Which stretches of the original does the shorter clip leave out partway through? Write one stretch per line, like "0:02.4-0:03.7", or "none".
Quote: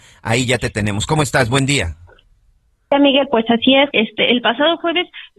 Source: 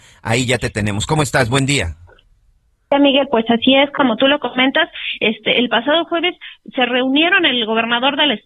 0:03.9-0:05.2